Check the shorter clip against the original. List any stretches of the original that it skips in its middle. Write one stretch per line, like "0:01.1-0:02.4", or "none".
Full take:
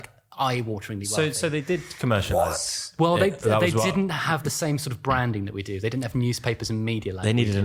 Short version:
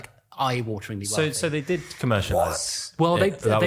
none